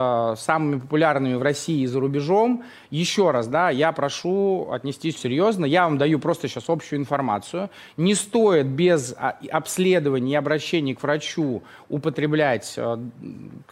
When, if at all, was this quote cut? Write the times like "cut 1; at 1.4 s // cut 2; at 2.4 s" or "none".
cut 1; at 5.2 s